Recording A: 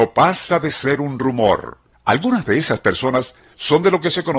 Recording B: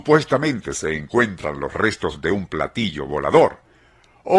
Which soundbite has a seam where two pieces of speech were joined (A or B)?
A